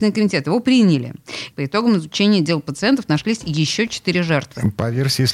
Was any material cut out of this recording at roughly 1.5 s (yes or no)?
yes